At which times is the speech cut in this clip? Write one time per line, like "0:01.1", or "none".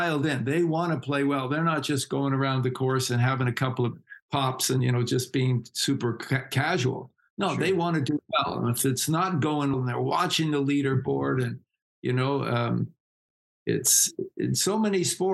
0:09.7